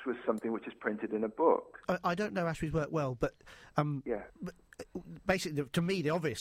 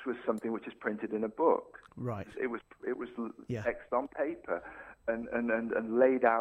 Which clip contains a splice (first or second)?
first